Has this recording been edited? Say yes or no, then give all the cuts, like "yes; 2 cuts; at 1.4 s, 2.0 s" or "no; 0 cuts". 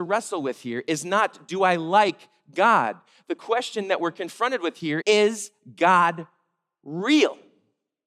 yes; 1 cut; at 5.0 s